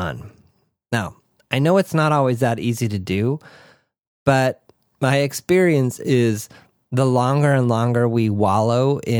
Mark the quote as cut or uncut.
uncut